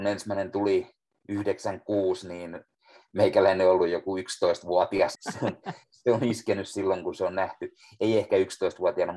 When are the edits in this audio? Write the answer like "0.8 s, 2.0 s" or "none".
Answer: 5.1 s